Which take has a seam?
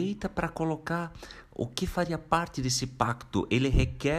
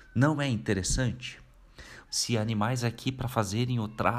second; 1 cut; at 2.1 s

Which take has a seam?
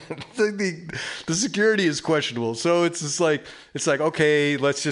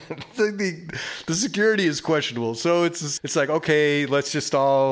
second; 1 cut; at 3.2 s

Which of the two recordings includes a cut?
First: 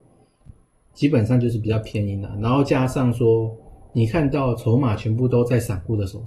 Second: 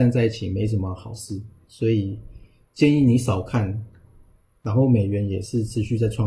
second; 2 cuts; at 1.6 s, 4.5 s

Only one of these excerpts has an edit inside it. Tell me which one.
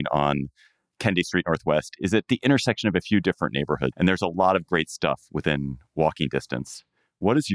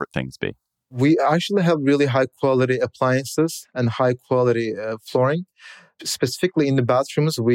first; 1 cut; at 3.9 s

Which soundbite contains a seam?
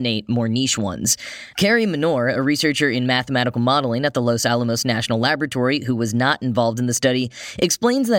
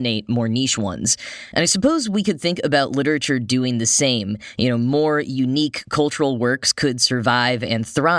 first; 1 cut; at 1.5 s

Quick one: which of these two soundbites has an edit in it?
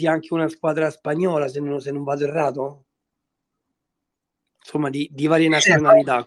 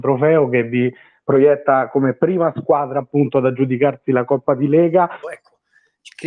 second; 1 cut; at 5.2 s

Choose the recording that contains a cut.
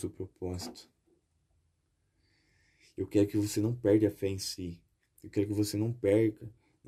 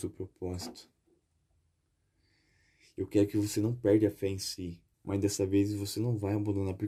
second; 1 cut; at 4.9 s

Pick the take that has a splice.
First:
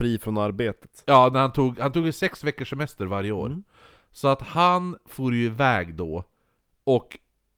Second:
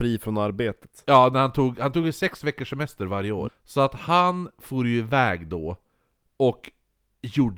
second; 1 cut; at 3.5 s

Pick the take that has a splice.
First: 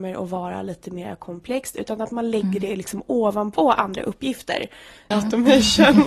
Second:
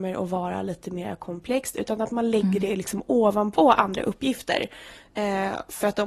first; 1 cut; at 5.1 s

